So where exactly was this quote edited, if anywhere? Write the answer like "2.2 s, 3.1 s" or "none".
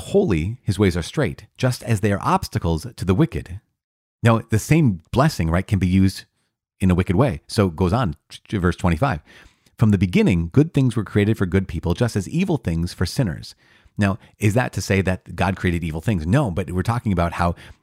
none